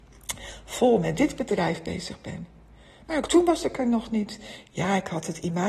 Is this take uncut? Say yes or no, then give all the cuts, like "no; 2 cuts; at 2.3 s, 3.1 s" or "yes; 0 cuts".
yes; 0 cuts